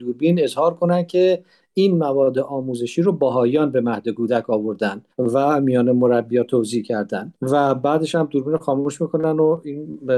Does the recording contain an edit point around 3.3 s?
no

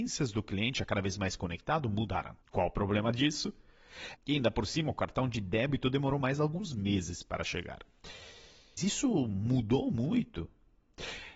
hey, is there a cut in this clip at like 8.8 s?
yes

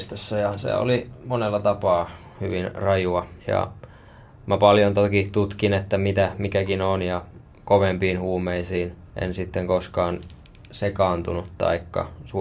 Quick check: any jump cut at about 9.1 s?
yes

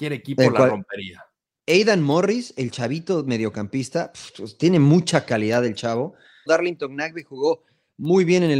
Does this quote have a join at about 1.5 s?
no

